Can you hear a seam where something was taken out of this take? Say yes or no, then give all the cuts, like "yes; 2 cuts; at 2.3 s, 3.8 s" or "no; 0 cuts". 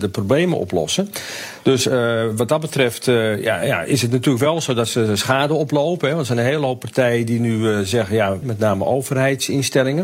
yes; 1 cut; at 8.4 s